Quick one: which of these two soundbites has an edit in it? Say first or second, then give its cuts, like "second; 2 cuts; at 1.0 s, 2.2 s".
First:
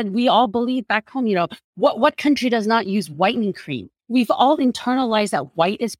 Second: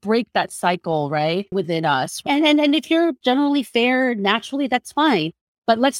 second; 2 cuts; at 1.5 s, 3.2 s